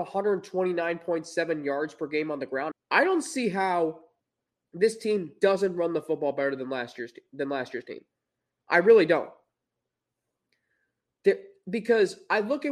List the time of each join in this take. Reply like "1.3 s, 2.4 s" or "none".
2.7 s